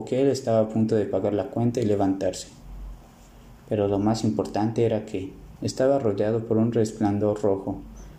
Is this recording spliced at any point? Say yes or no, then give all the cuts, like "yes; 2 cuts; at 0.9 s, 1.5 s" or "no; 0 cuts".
yes; 1 cut; at 5.6 s